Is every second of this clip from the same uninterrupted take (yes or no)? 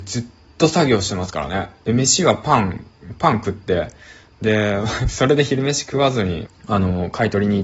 no